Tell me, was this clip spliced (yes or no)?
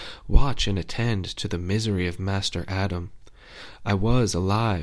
no